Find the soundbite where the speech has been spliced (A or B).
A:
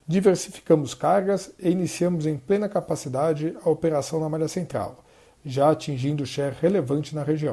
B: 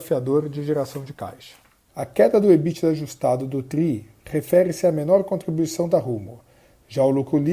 B